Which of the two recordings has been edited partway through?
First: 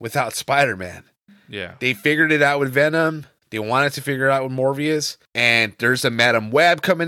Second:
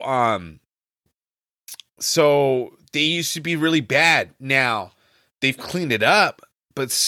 first; 1 cut; at 5.3 s

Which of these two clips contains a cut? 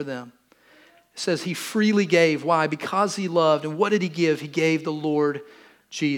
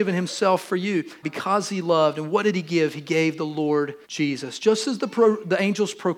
second; 2 cuts; at 1.2 s, 4.0 s

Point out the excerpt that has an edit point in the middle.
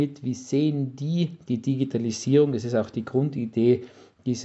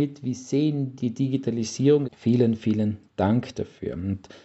second; 2 cuts; at 1.0 s, 2.0 s

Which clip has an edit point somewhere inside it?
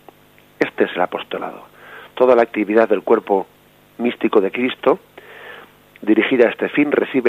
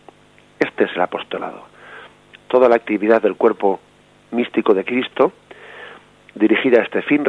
first; 1 cut; at 2.1 s

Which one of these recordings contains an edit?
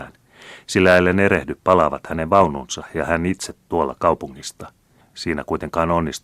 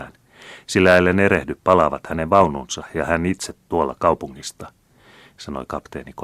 first; 1 cut; at 5.0 s

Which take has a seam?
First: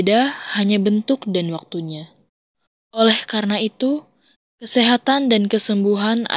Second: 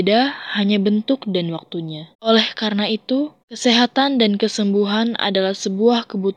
second; 2 cuts; at 2.1 s, 3.4 s

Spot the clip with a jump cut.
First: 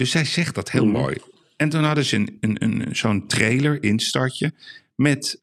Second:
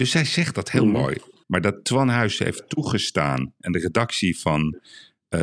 second; 1 cut; at 1.4 s

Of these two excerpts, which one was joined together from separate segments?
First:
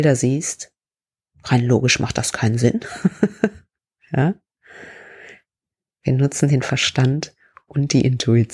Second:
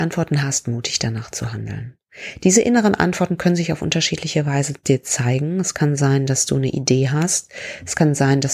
first; 1 cut; at 1.3 s

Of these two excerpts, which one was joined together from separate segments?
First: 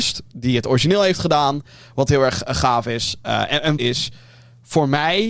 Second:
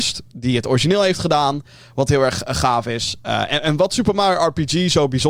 first; 1 cut; at 3.8 s

